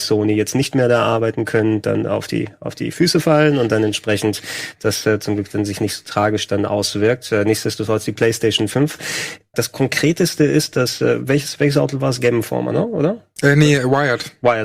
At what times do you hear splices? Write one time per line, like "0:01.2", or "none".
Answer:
0:09.5